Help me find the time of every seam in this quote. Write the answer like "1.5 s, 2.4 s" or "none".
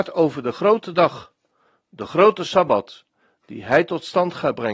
none